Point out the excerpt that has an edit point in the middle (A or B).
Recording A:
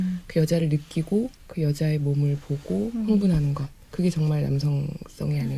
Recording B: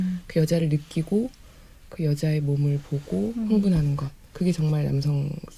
A